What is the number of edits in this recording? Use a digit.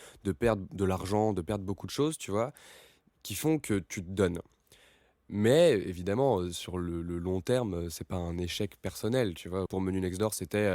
1